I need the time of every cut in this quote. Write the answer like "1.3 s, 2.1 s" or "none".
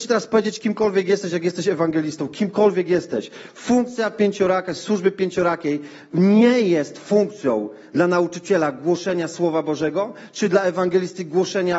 none